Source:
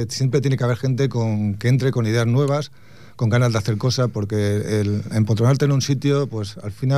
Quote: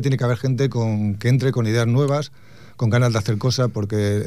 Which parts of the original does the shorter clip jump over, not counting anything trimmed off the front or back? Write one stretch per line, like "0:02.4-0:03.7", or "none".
none